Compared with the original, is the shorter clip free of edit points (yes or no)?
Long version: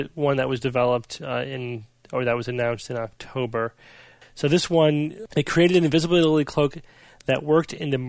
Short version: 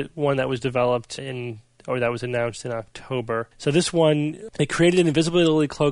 no